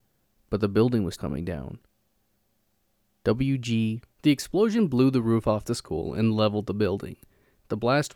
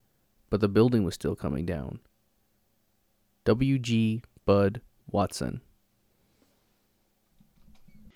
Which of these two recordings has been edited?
first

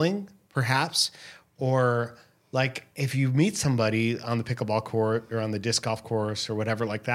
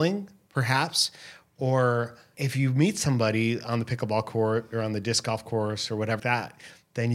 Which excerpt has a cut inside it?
second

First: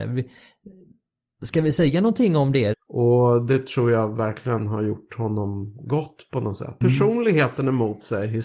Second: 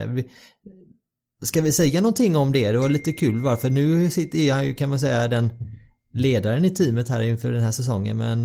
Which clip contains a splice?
first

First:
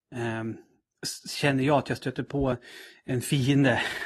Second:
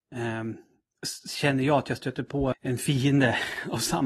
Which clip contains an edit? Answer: second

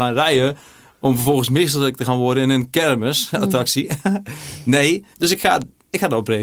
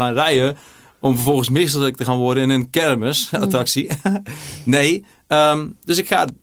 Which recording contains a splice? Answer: first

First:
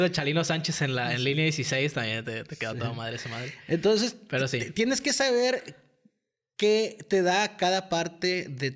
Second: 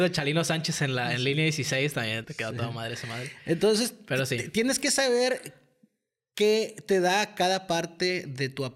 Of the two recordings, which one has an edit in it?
second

